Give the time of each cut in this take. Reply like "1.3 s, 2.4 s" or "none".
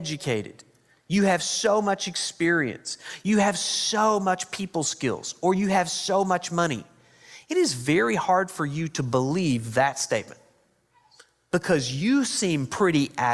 none